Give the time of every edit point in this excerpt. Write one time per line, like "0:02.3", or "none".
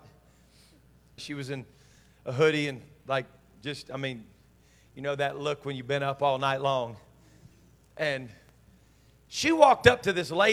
0:01.2